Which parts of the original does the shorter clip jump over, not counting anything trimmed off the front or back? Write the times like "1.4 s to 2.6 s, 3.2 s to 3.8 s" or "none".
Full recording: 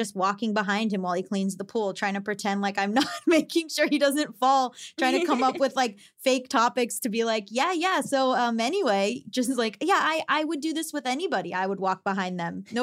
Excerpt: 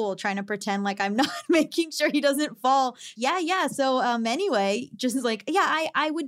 4.9 s to 7.5 s